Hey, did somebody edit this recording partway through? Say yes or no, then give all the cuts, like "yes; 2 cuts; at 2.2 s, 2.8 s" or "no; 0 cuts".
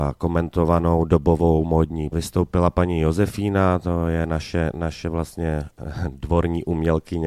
yes; 1 cut; at 2.1 s